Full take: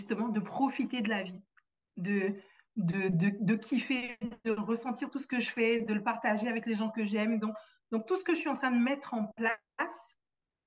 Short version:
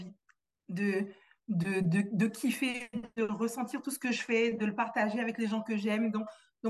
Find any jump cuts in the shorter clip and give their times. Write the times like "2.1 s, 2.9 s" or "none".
none